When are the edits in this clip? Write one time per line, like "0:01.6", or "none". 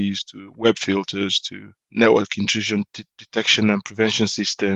none

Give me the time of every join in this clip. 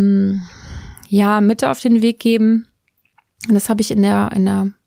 none

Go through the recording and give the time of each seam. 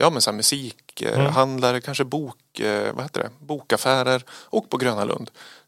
none

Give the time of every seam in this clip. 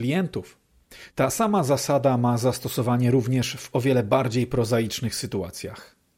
0:01.1

